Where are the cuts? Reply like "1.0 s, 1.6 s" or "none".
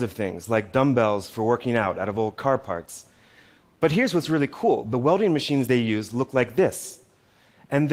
none